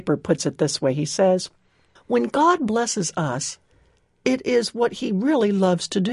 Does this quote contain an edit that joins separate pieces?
no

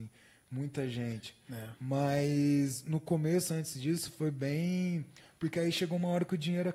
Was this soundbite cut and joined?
no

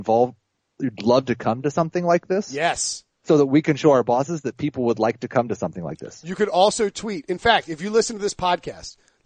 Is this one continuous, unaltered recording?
yes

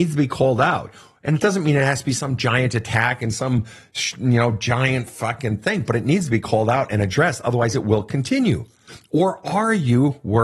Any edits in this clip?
no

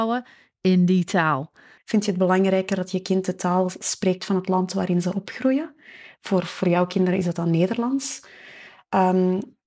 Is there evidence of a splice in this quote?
yes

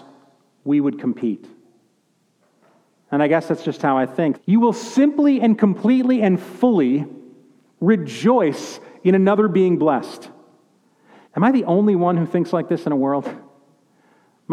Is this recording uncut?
no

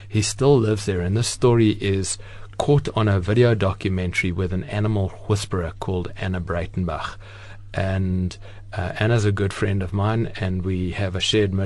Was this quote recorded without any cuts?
yes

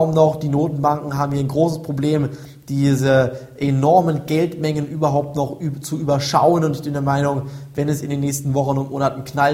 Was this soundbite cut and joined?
no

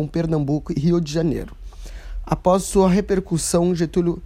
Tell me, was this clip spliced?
no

